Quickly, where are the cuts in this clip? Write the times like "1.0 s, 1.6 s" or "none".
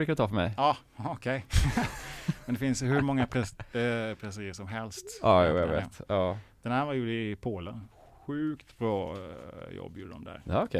none